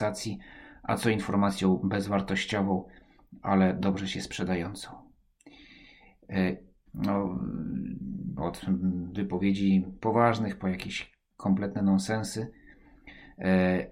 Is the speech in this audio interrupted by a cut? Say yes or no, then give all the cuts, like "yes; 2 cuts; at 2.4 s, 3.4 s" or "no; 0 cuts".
yes; 2 cuts; at 6.9 s, 8.4 s